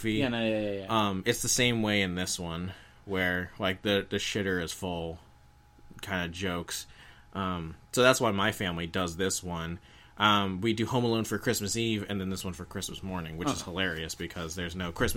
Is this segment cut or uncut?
uncut